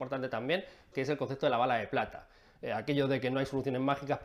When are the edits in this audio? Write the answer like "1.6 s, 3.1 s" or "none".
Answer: 0.9 s